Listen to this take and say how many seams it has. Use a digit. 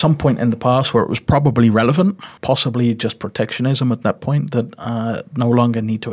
1